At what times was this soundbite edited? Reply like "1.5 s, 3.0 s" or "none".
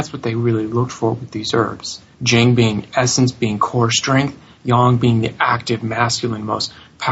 2.1 s